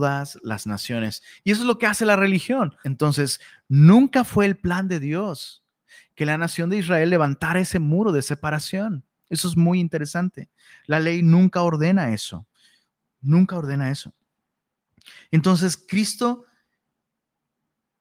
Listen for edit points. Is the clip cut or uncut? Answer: cut